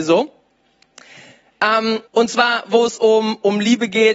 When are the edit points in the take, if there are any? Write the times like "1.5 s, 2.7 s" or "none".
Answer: 2.0 s